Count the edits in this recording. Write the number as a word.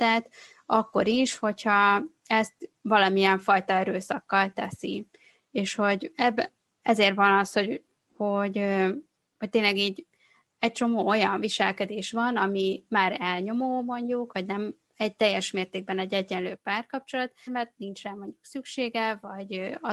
two